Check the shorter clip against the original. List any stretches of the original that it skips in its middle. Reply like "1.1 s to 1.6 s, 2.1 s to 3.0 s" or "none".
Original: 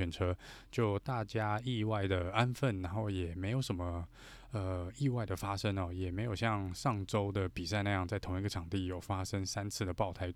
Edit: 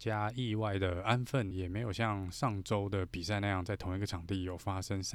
2.8 s to 5.9 s